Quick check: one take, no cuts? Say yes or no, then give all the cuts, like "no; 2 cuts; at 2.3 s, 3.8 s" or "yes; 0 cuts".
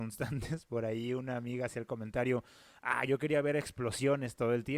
yes; 0 cuts